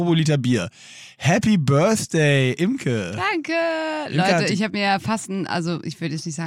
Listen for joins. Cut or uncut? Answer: uncut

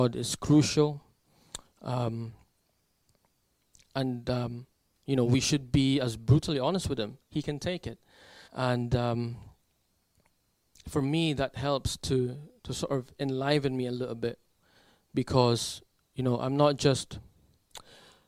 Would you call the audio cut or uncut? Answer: cut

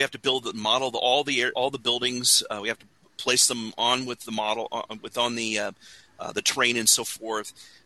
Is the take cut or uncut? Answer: cut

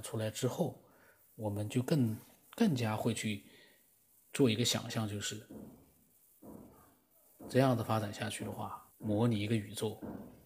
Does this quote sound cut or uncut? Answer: cut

